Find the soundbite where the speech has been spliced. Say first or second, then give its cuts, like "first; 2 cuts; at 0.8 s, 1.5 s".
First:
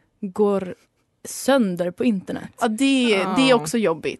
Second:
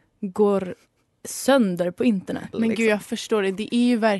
second; 1 cut; at 2.5 s